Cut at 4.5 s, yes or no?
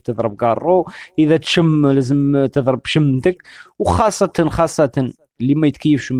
yes